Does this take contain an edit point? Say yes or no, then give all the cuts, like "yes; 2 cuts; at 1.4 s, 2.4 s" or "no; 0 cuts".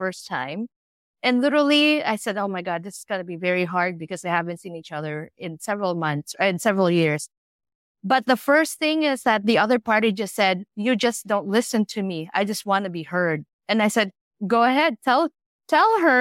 no; 0 cuts